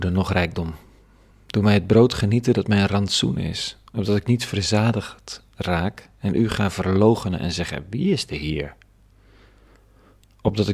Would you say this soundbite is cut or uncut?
uncut